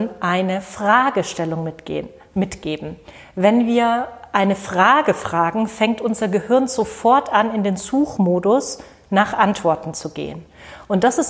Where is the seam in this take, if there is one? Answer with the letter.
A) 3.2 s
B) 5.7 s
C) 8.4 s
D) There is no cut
D